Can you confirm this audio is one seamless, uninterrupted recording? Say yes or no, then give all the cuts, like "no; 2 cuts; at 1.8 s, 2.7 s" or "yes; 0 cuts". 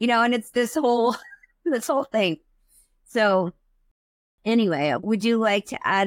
yes; 0 cuts